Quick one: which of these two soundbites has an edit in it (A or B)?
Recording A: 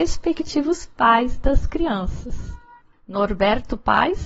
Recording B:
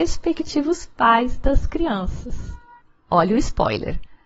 A